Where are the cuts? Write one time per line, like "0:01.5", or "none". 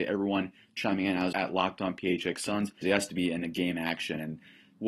0:01.3
0:02.8